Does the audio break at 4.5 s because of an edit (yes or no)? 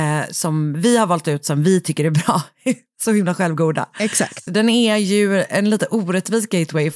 yes